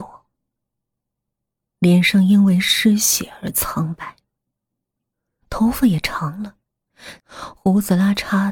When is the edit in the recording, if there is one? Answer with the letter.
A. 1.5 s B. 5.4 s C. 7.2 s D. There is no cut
C